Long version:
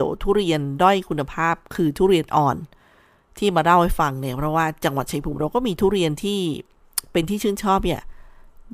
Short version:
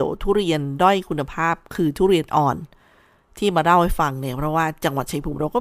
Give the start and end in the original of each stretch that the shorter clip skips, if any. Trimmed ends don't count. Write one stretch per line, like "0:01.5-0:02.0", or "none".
none